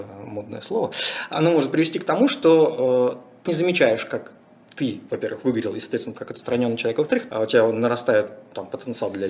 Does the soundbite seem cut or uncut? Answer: cut